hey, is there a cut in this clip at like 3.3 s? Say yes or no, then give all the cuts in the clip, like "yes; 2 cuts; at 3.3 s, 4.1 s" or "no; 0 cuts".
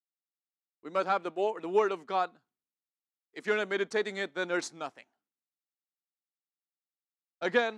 yes; 1 cut; at 3.3 s